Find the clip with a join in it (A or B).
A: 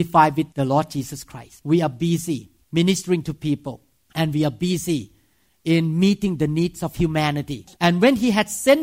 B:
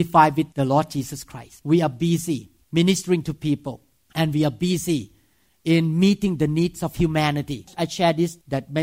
A